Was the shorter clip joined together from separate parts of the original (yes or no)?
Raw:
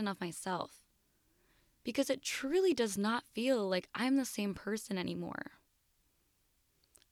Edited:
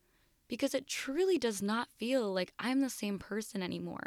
no